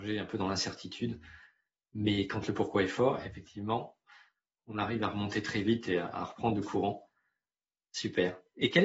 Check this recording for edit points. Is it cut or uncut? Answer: uncut